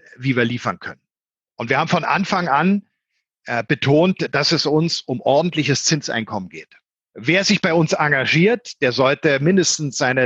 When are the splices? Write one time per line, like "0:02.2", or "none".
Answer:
0:07.1